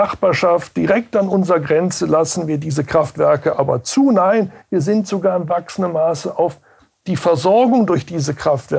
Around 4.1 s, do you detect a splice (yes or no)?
no